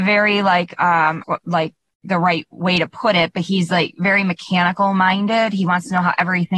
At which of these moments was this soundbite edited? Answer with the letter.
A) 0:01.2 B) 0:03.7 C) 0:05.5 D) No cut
A